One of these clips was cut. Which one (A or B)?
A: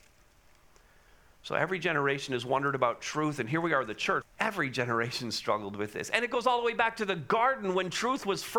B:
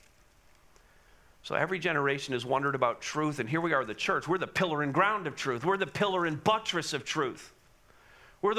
A